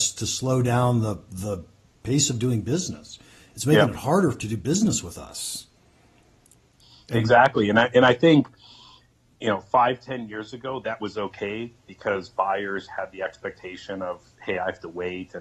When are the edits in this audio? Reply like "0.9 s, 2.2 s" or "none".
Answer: none